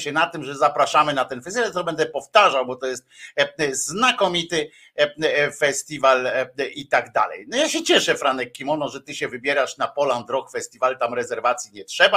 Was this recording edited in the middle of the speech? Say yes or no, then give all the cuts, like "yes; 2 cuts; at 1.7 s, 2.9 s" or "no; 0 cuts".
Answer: no; 0 cuts